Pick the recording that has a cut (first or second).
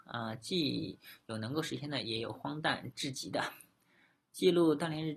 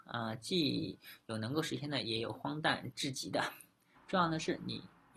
second